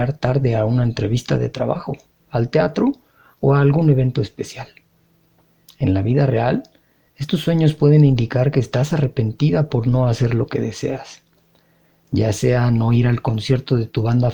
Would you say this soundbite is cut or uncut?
uncut